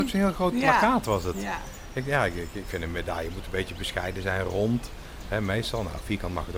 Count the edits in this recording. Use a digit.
0